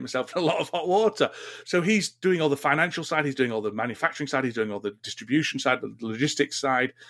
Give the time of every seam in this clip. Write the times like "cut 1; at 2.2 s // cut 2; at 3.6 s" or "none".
cut 1; at 1.6 s